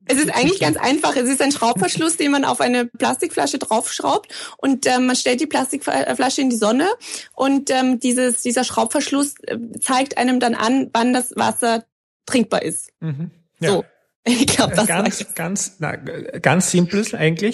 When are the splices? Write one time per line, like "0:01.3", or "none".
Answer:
0:02.9
0:08.0